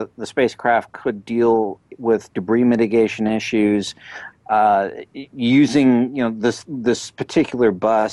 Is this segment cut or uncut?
cut